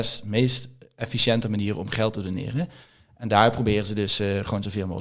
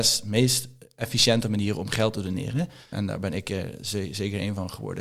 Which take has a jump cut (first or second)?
second